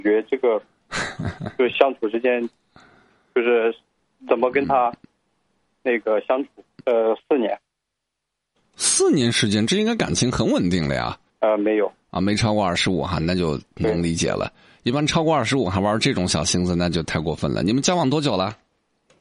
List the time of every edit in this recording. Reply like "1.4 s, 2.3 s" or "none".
6.8 s, 11.3 s

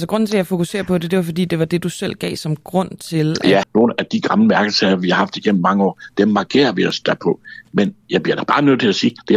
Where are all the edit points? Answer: 3.6 s

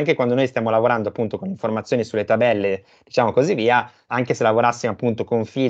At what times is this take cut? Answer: 4.1 s

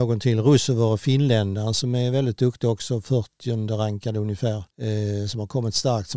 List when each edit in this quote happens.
4.7 s

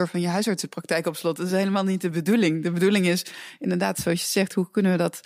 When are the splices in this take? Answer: none

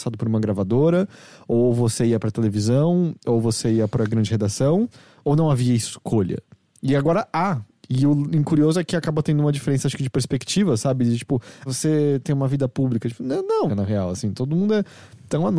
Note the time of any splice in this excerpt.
11.7 s, 13.7 s

